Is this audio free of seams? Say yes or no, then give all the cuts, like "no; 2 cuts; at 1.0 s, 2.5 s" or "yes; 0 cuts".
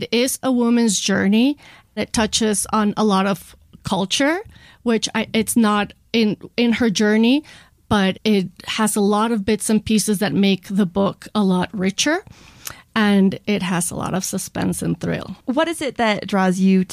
no; 2 cuts; at 8.2 s, 15.4 s